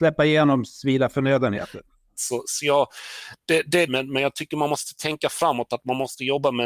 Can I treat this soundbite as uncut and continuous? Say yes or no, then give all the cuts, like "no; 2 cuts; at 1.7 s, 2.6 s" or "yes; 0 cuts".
no; 2 cuts; at 2.1 s, 3.9 s